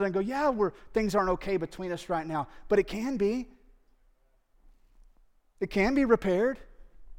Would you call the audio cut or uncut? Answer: uncut